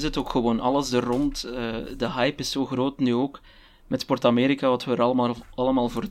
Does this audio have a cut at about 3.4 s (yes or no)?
no